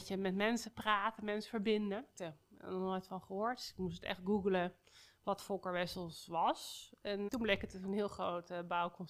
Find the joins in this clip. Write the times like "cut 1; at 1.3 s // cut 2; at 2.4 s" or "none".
cut 1; at 2.2 s // cut 2; at 7.3 s